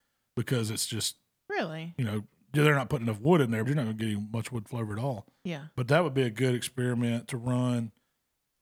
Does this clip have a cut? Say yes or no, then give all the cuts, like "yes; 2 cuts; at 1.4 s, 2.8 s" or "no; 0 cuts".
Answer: yes; 1 cut; at 3.6 s